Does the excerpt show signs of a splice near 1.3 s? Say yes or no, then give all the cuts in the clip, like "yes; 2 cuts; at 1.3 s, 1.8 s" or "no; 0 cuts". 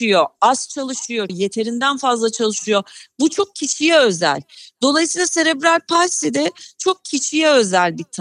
yes; 1 cut; at 1.3 s